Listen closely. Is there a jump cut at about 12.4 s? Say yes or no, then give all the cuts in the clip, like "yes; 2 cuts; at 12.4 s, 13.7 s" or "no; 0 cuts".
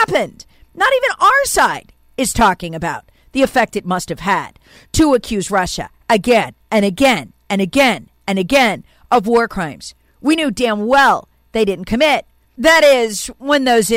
yes; 1 cut; at 12.4 s